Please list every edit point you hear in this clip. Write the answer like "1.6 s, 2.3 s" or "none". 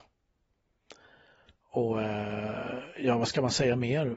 none